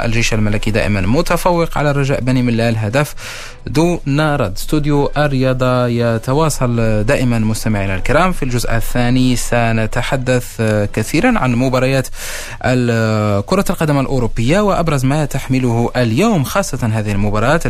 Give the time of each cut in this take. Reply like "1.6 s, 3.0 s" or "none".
none